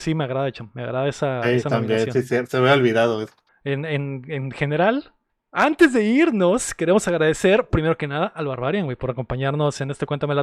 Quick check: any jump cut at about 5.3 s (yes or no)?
yes